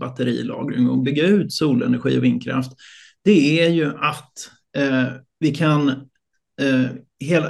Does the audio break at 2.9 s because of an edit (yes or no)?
no